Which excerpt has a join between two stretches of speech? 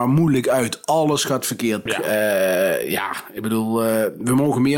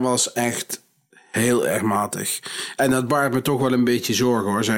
first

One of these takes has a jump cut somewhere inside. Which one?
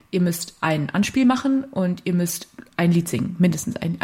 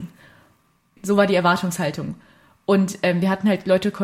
second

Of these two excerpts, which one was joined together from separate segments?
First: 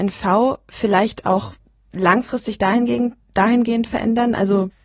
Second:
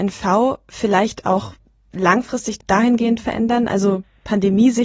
second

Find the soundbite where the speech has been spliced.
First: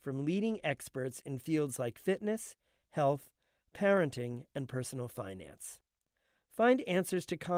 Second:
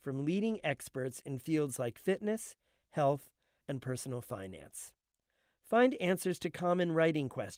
second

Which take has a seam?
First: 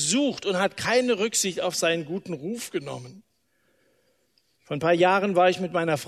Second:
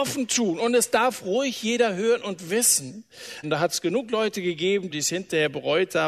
second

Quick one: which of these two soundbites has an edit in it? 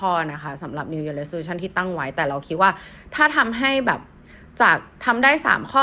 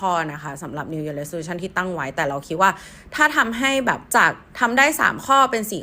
second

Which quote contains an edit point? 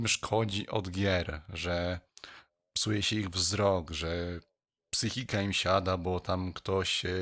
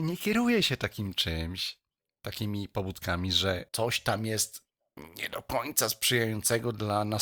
second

